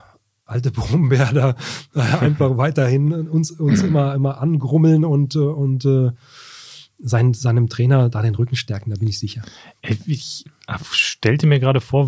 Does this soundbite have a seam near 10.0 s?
no; 0 cuts

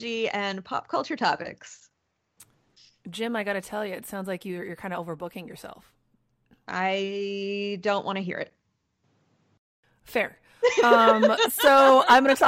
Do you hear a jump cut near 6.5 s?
no; 0 cuts

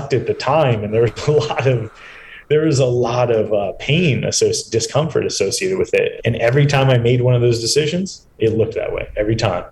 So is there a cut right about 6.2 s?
yes; 1 cut; at 6.2 s

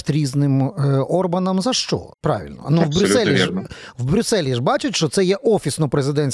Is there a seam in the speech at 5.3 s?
no; 1 cut; at 2.1 s

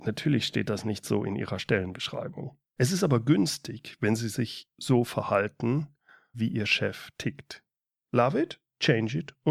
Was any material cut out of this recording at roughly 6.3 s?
yes; 3 cuts; at 2.8 s, 6.3 s, 8.0 s

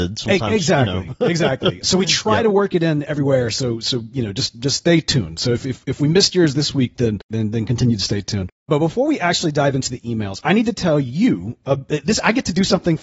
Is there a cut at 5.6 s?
no; 0 cuts

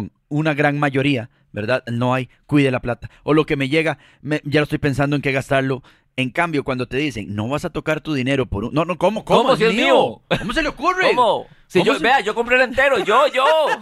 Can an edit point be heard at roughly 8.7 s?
no; 0 cuts

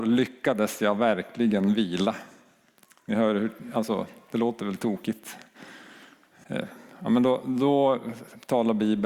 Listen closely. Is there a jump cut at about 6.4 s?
yes; 1 cut; at 6.4 s

